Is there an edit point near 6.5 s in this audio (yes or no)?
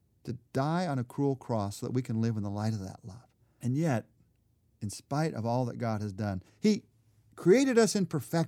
yes